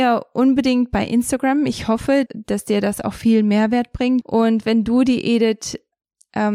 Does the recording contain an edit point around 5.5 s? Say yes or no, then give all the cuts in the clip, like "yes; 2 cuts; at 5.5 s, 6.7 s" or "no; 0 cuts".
no; 2 cuts; at 2.3 s, 4.2 s